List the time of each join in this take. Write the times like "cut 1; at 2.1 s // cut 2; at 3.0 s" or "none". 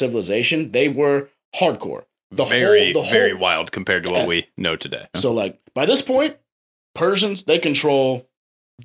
cut 1; at 5.1 s